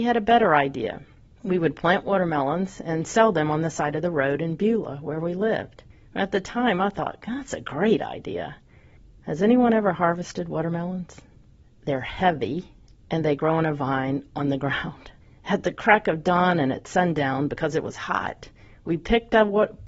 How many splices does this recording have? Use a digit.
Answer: 0